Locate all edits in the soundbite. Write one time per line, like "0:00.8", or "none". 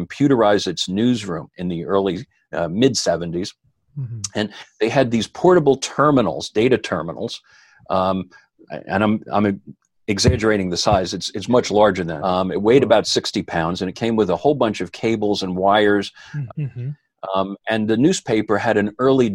0:12.2
0:16.5